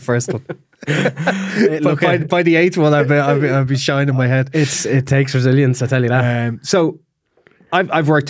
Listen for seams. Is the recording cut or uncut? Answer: uncut